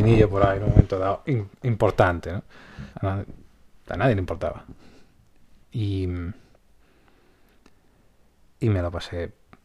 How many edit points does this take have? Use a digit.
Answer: 2